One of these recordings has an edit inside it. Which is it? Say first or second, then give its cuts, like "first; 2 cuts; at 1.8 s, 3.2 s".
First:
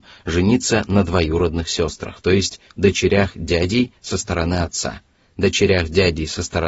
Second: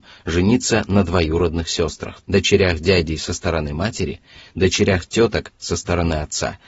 second; 1 cut; at 2.2 s